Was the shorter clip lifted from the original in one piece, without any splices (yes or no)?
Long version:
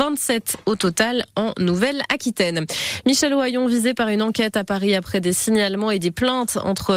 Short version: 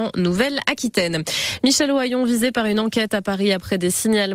yes